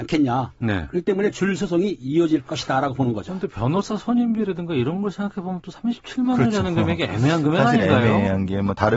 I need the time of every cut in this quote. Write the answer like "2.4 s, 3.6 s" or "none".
none